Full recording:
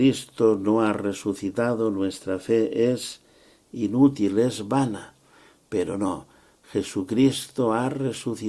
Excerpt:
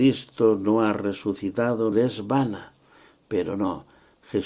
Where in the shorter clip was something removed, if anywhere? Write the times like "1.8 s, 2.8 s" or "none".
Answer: 1.9 s